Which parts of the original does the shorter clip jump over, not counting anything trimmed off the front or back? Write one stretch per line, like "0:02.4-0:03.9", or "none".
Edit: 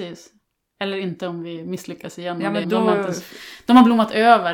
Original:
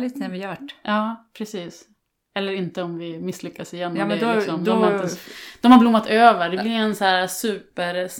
0:04.2-0:04.6